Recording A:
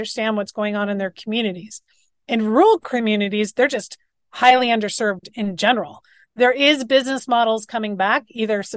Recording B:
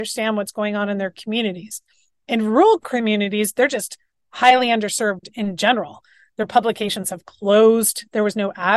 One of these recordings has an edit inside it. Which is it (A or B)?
A